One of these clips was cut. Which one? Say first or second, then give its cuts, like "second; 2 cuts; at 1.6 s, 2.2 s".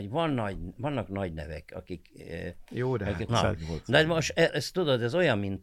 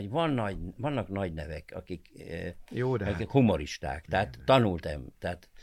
first; 2 cuts; at 3.3 s, 4.5 s